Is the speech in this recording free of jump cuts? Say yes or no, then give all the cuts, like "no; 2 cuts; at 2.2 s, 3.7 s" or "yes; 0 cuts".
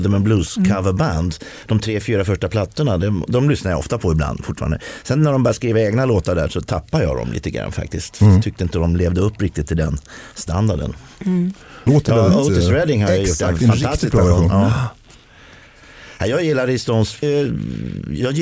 no; 2 cuts; at 11.9 s, 17.2 s